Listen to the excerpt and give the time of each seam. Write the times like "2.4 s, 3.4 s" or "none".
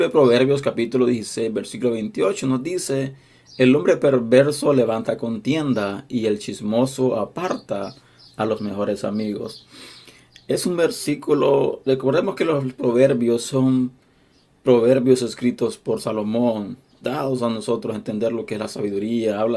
17.0 s